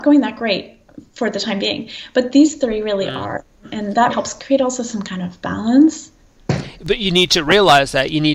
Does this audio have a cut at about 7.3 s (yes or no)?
yes